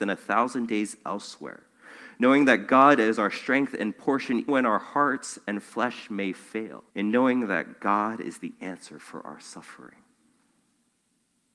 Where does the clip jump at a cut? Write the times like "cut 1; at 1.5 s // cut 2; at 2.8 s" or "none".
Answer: cut 1; at 4.5 s // cut 2; at 6.9 s